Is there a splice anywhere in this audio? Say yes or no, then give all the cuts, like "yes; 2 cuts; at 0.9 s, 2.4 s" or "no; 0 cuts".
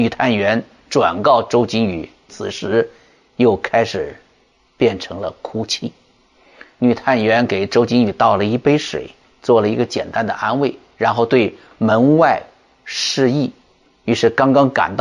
yes; 1 cut; at 2.3 s